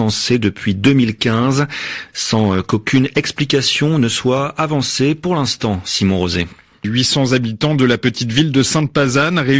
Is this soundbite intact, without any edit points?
no; 2 cuts; at 2.1 s, 6.8 s

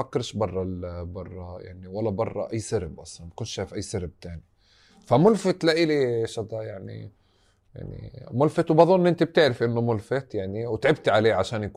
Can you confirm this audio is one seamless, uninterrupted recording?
yes; 0 cuts

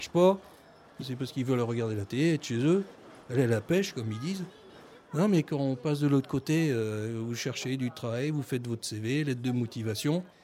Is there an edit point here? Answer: no; 0 cuts

